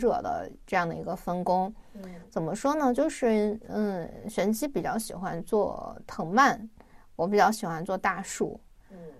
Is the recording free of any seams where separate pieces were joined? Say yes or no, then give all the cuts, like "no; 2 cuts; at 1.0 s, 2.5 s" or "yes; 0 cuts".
yes; 0 cuts